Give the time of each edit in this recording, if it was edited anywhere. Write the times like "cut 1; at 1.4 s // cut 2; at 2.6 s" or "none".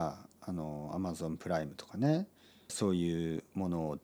cut 1; at 2.7 s